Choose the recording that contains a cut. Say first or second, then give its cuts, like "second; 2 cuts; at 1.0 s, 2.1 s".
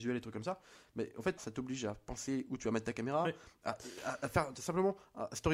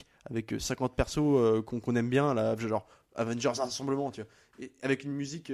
first; 1 cut; at 1.4 s